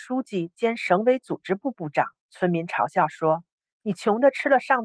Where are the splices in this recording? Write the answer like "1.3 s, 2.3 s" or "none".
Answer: 2.2 s